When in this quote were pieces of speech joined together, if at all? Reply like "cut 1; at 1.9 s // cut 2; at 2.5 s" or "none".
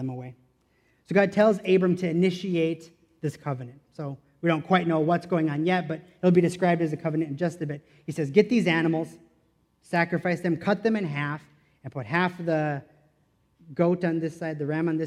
none